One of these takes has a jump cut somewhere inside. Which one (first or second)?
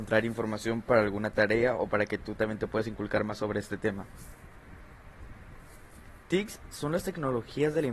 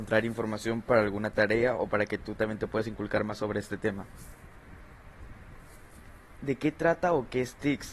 first